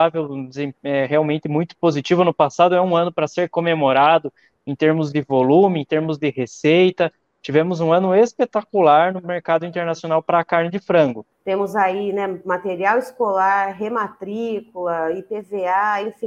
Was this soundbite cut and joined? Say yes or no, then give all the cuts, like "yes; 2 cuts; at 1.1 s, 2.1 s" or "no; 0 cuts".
yes; 1 cut; at 11.3 s